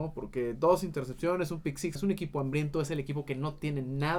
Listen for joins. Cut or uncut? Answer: cut